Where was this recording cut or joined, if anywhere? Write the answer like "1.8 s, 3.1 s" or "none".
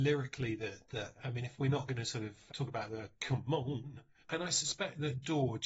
2.5 s, 4.2 s